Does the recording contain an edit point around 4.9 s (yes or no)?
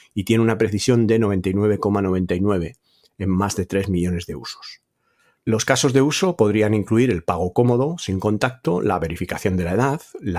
no